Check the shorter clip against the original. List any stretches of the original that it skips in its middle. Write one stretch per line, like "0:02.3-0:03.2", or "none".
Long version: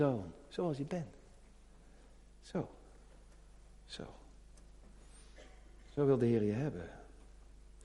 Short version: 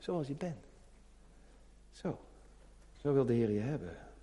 0:03.4-0:05.9